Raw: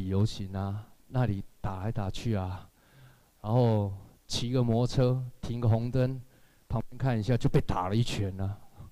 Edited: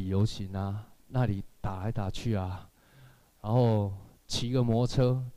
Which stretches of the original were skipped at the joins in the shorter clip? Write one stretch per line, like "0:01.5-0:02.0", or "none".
none